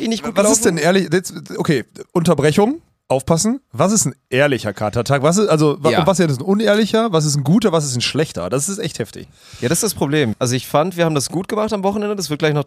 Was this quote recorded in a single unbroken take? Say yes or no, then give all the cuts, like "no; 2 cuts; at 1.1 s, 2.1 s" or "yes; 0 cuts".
no; 2 cuts; at 9.2 s, 10.3 s